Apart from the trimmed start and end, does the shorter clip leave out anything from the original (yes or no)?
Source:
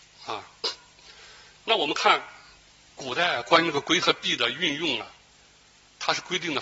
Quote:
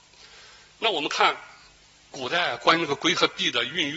no